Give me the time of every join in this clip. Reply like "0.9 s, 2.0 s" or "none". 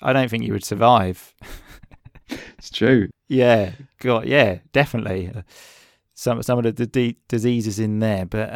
3.1 s, 5.3 s